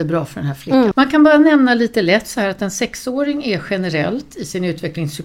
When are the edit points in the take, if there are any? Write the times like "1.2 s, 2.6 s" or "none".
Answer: 0.9 s